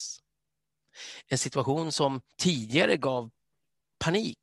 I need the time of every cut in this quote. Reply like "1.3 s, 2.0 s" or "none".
2.3 s